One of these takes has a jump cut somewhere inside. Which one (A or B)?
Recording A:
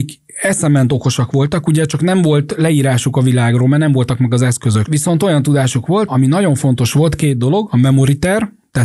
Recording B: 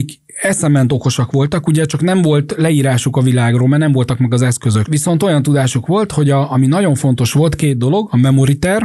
A